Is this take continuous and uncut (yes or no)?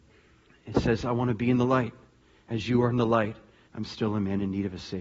no